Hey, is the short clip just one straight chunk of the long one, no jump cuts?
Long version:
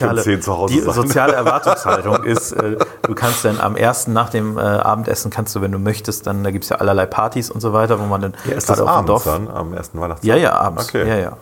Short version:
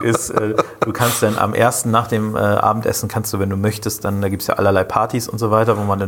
yes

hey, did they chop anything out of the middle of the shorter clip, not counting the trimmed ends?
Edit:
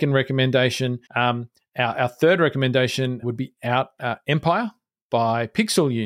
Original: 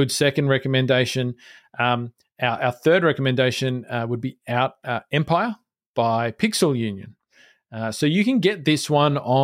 yes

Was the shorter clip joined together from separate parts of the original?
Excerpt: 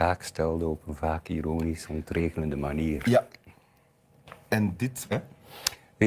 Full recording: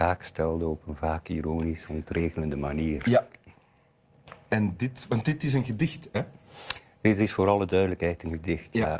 yes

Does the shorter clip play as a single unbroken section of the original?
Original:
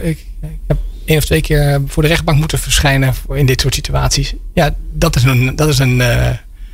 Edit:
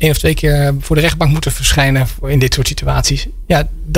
yes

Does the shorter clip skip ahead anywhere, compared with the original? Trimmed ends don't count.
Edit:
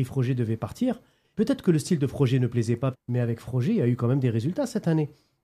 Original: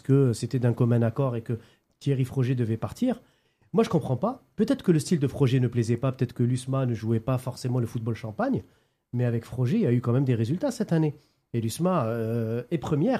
yes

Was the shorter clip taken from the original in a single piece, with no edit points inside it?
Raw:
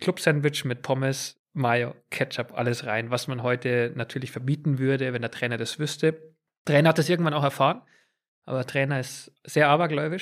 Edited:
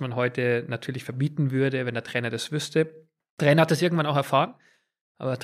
yes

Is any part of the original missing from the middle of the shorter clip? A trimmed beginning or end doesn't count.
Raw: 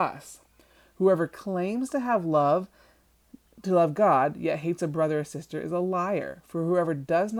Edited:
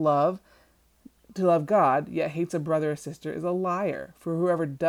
no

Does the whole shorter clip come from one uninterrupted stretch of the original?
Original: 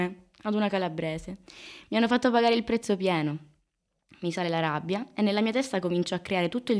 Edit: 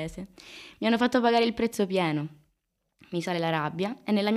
yes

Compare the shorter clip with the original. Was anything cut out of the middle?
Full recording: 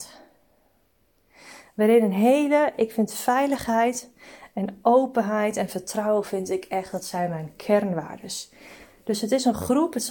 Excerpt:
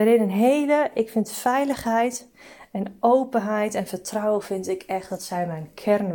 no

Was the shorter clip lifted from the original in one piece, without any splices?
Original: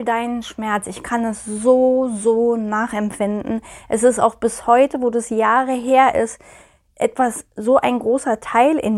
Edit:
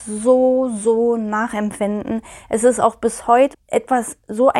no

